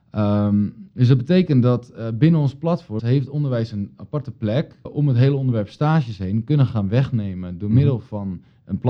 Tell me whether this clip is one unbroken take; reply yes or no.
no